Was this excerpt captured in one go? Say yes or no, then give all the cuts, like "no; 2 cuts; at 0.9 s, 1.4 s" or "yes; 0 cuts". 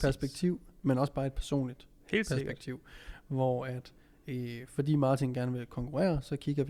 yes; 0 cuts